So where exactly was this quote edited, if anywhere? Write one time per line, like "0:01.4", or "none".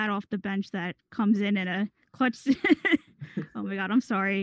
none